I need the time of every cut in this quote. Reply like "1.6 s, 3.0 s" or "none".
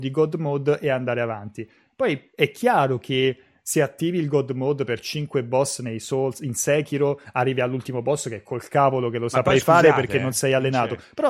none

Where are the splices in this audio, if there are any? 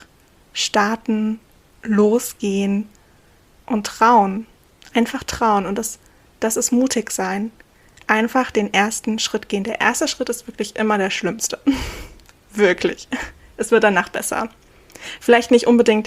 none

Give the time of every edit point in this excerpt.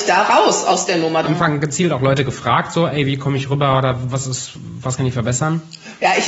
1.2 s

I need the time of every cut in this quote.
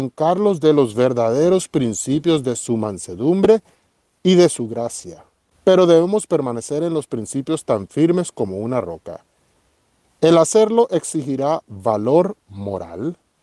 none

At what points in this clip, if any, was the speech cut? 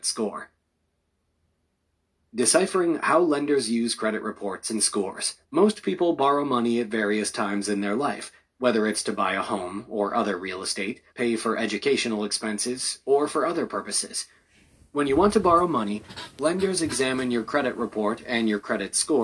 5.4 s, 11.1 s

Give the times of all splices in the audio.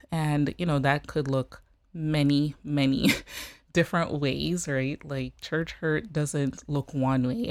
none

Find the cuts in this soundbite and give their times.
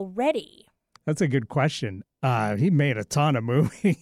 1.0 s, 2.0 s

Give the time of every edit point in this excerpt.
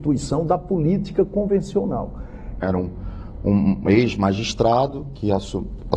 2.6 s

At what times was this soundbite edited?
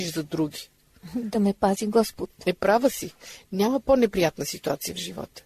none

